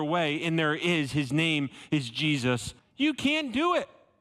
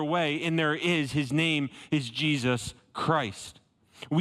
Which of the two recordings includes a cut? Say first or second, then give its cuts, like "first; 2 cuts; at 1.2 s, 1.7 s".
first; 1 cut; at 2.8 s